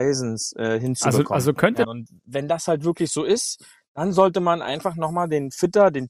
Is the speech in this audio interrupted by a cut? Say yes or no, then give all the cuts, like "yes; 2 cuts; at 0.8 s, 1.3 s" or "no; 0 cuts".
yes; 1 cut; at 1.8 s